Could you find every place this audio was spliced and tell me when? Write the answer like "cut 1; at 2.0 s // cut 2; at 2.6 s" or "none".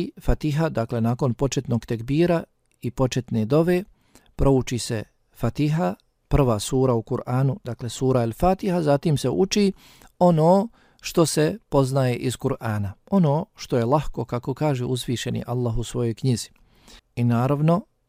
cut 1; at 17.0 s